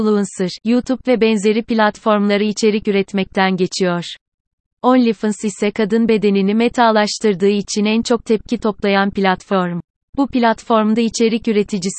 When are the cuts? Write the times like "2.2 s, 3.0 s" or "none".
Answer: none